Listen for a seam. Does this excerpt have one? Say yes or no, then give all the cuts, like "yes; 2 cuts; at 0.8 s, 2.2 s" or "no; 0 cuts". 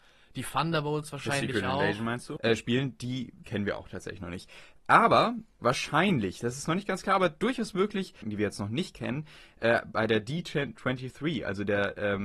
yes; 2 cuts; at 2.4 s, 8.2 s